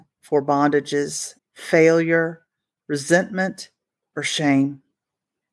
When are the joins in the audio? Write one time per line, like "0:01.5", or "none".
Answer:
0:01.4
0:04.0